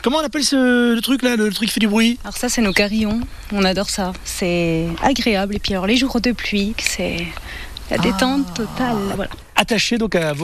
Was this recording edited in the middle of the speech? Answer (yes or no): yes